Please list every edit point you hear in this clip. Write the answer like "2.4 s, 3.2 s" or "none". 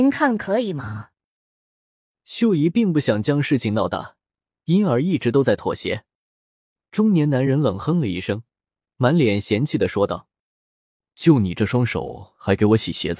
none